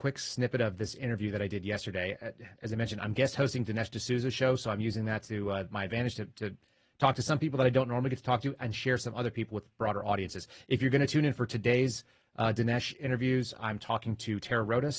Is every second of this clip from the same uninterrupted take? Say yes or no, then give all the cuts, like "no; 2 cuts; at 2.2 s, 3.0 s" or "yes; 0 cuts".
yes; 0 cuts